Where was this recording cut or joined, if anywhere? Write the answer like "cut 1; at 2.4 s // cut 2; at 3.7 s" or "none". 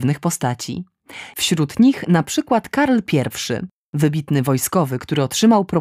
cut 1; at 1.3 s